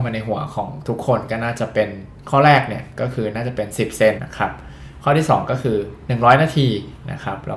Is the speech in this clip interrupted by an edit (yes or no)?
yes